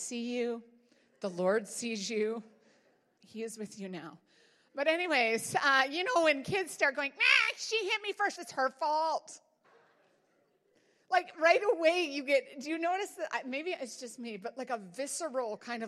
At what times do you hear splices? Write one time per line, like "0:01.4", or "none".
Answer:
0:08.3
0:09.6